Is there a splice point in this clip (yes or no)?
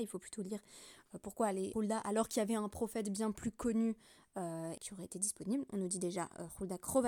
yes